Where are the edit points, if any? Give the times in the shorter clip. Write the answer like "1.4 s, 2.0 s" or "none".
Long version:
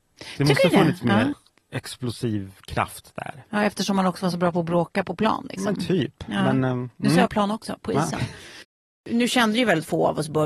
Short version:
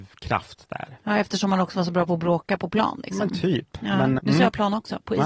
4.2 s

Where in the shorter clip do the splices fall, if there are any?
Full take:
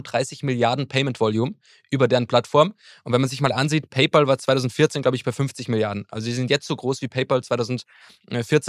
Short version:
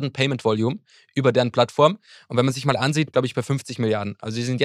3.1 s

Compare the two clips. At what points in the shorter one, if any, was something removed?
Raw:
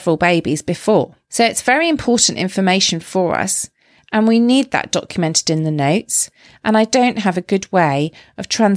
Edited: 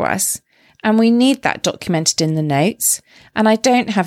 none

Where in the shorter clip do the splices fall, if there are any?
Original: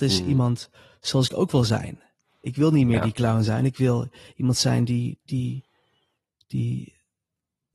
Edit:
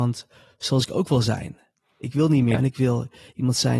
2.6 s

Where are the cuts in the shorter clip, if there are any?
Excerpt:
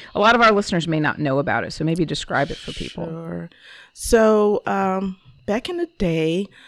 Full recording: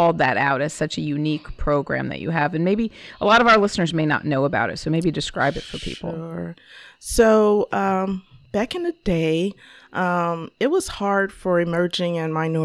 none

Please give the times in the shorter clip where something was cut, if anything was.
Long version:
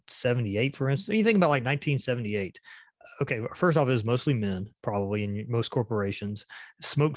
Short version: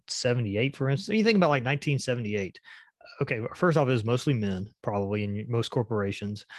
none

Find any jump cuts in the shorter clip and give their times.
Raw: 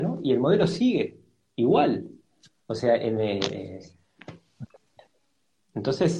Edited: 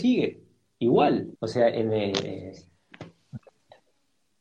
1.3 s

